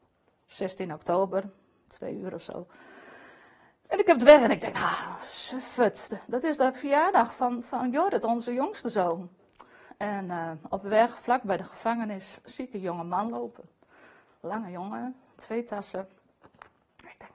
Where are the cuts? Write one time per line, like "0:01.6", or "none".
0:09.9